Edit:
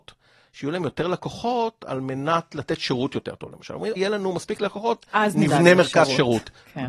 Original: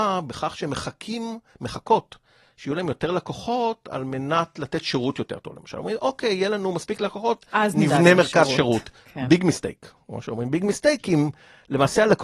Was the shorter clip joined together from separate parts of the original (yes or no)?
yes